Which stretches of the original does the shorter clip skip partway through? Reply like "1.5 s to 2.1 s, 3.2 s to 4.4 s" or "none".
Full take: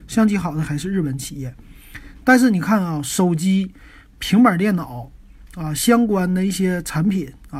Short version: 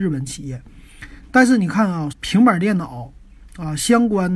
3.0 s to 4.1 s